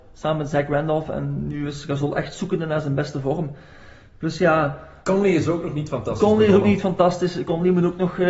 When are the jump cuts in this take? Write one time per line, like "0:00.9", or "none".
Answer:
none